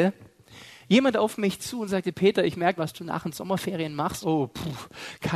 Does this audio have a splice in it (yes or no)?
yes